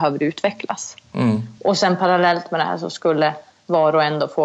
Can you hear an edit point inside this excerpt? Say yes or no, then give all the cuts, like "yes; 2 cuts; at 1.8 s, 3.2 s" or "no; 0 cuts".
no; 0 cuts